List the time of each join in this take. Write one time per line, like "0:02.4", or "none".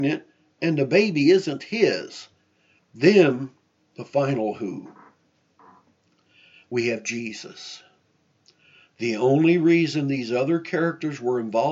0:02.8